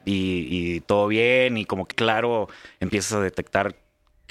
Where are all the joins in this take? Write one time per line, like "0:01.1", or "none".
0:01.9